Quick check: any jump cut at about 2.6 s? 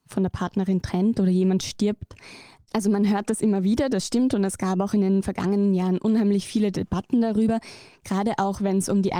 yes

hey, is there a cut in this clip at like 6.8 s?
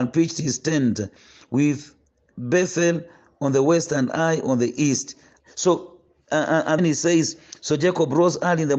yes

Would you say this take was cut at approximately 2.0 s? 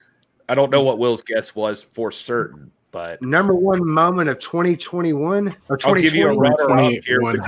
no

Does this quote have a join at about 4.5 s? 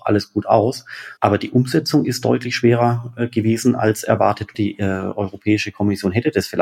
yes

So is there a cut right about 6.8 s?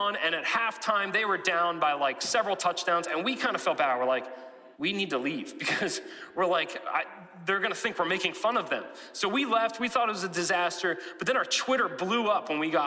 no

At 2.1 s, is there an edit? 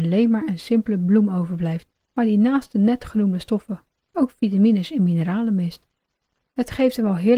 yes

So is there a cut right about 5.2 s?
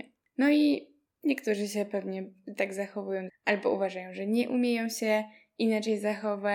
no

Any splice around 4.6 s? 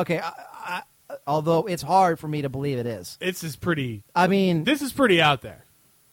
no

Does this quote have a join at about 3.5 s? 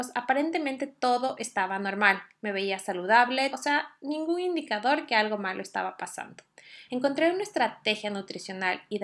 yes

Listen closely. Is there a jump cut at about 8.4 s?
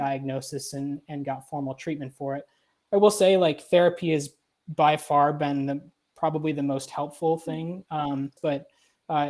yes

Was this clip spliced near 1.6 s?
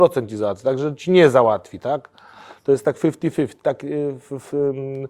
no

